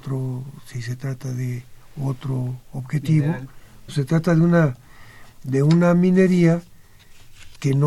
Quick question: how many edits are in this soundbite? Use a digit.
1